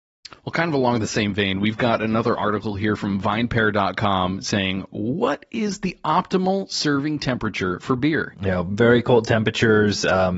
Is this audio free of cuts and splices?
no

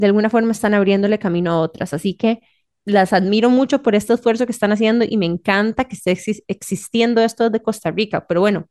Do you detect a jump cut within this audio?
yes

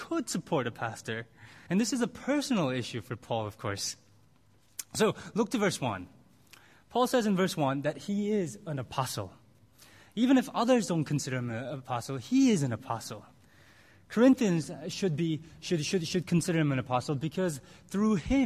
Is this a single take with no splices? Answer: no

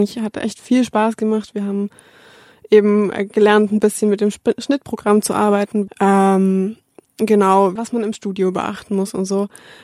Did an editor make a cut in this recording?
yes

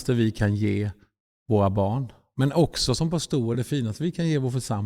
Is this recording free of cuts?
yes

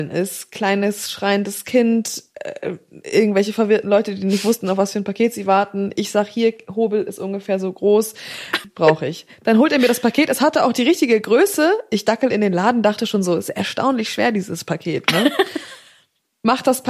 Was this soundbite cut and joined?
no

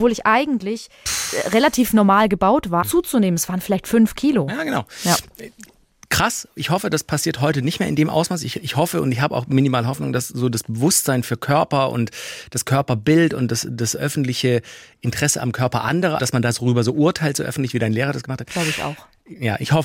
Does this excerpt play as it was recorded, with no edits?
no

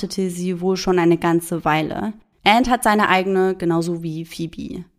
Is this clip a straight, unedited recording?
no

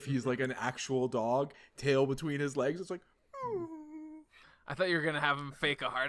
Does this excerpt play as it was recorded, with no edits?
yes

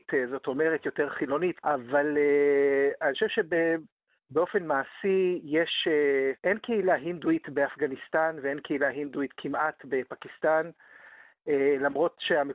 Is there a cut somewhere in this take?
yes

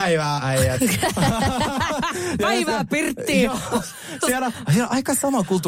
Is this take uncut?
yes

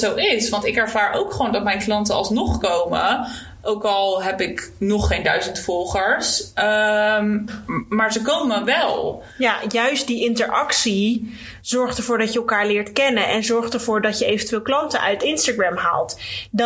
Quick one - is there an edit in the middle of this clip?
no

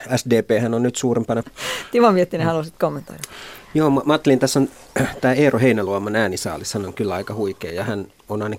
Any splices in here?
yes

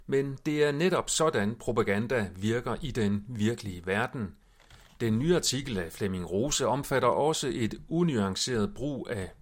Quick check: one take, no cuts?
no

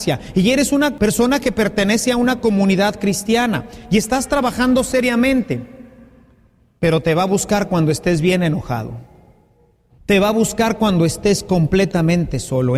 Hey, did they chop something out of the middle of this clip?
no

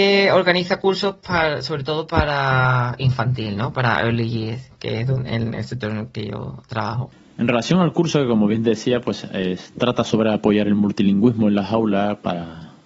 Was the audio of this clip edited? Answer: no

